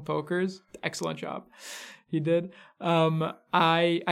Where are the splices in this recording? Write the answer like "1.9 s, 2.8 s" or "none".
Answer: none